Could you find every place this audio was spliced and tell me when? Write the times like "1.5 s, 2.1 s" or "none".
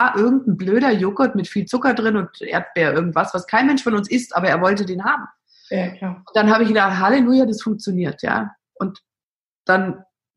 none

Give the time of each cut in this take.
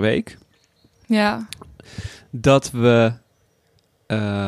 none

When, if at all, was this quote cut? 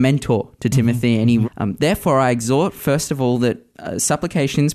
1.4 s

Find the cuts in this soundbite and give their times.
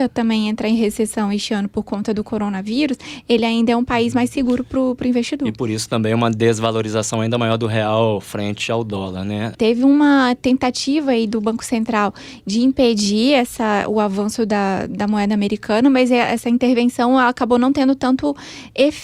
9.5 s

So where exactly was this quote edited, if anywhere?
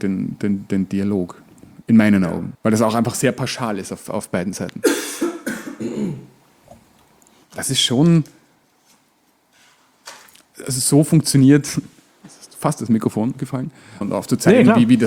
2.5 s, 7.4 s, 14.0 s

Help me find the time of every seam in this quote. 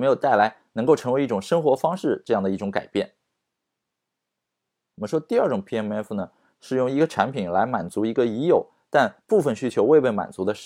none

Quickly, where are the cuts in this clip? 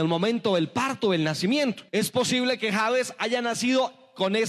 1.9 s

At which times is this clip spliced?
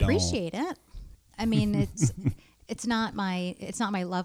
1.1 s

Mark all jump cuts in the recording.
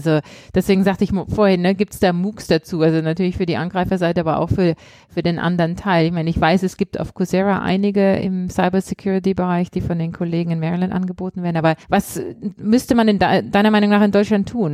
11.8 s

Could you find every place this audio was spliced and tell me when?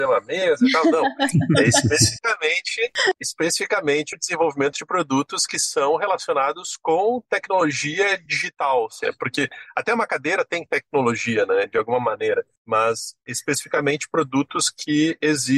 9.0 s

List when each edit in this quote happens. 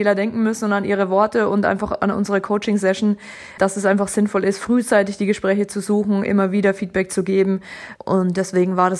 3.6 s, 8.0 s

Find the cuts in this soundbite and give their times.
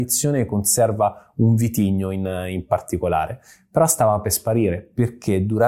none

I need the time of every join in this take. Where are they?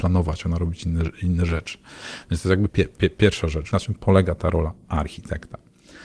2.7 s, 3.7 s

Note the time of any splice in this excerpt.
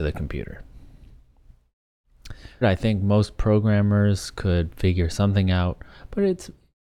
2.6 s

